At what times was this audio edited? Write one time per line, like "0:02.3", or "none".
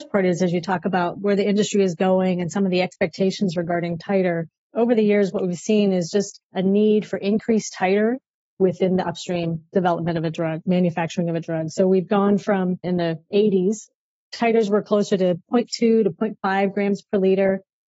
none